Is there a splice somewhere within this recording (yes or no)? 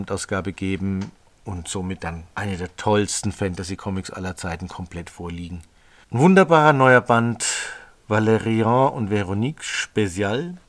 yes